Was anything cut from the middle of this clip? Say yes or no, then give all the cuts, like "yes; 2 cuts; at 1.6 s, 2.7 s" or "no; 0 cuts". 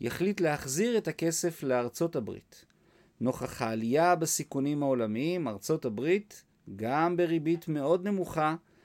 no; 0 cuts